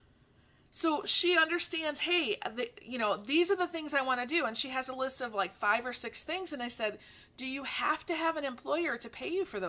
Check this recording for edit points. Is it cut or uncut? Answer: uncut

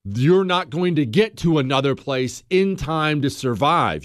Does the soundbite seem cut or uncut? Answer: uncut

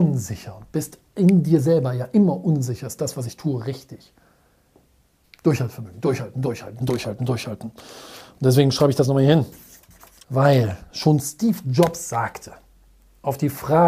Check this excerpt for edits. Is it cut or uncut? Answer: cut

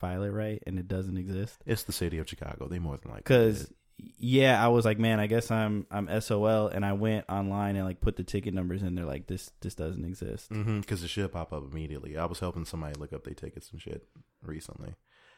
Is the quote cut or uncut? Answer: uncut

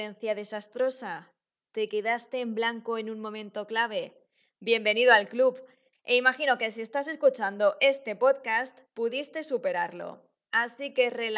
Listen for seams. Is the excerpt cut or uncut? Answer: cut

